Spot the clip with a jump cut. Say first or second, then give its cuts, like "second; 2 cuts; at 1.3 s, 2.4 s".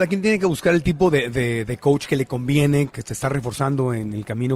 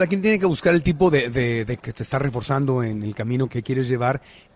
second; 2 cuts; at 1.8 s, 3.5 s